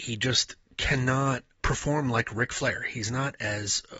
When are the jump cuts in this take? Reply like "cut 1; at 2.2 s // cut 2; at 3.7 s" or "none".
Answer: cut 1; at 1.6 s